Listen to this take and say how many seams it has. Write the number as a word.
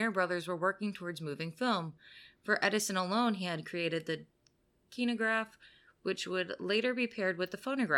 zero